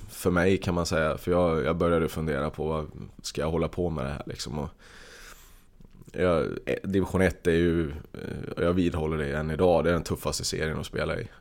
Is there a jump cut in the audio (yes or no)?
no